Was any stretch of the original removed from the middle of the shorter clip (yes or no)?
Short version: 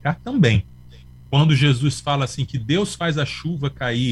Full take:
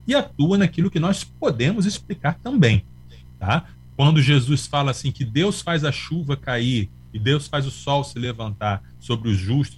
yes